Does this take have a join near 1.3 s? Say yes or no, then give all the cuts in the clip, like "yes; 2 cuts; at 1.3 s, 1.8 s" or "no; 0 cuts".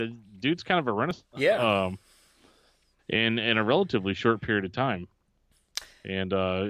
yes; 1 cut; at 1.3 s